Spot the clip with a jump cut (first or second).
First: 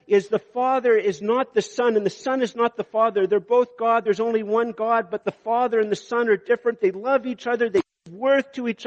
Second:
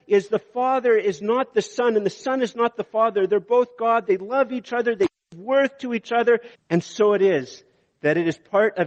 second